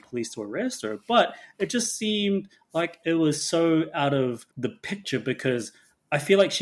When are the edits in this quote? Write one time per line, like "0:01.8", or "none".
0:04.5